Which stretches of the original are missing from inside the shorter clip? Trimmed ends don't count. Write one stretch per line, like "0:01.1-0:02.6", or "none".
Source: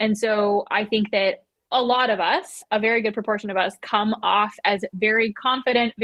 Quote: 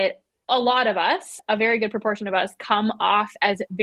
none